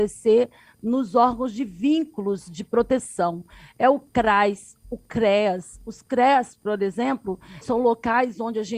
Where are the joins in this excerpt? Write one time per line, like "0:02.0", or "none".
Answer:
0:07.6